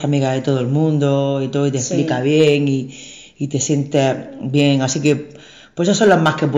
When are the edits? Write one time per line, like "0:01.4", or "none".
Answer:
none